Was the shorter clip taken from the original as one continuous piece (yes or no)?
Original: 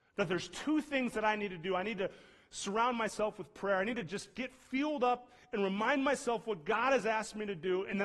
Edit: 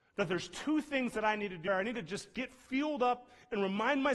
no